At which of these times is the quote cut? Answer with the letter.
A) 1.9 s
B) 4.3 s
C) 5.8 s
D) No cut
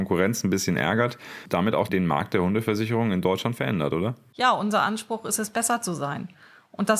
A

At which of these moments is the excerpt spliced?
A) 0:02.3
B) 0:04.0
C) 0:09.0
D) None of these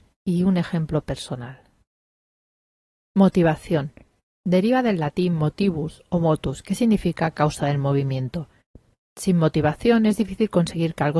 D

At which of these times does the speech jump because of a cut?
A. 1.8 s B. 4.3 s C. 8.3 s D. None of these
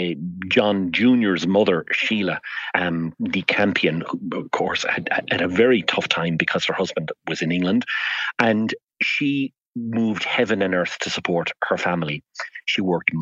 D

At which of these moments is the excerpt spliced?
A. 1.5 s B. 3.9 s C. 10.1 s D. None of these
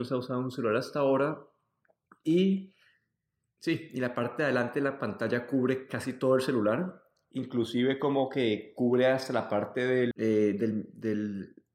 C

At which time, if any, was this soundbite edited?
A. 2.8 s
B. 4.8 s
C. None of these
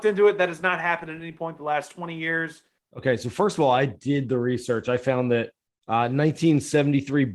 A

